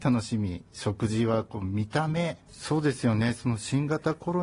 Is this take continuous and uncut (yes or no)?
no